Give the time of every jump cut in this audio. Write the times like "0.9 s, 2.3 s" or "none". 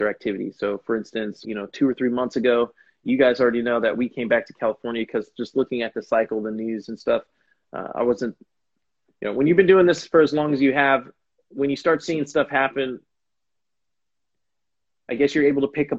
1.4 s